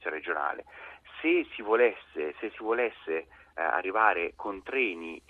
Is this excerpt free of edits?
yes; 0 cuts

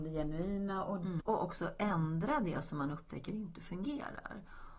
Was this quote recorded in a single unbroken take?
no; 1 cut; at 1.2 s

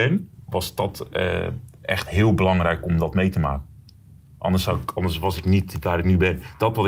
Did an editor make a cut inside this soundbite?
no; 0 cuts

